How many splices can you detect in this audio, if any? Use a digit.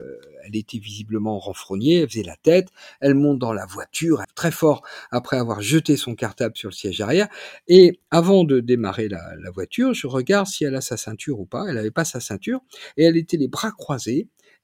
1